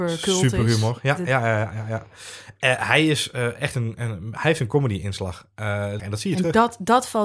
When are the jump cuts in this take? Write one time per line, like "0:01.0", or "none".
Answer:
0:06.0